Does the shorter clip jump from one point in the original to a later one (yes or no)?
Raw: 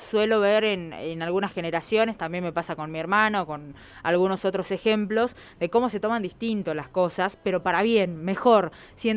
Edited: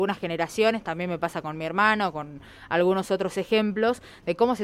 no